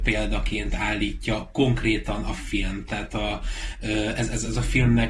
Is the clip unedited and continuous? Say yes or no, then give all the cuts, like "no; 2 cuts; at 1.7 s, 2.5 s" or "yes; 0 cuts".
yes; 0 cuts